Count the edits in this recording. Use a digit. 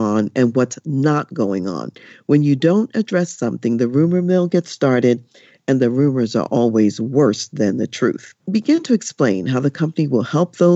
1